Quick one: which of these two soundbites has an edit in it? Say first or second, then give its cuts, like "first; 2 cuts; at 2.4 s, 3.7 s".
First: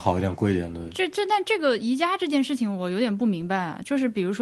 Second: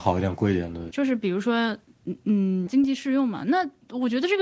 second; 2 cuts; at 0.9 s, 2.7 s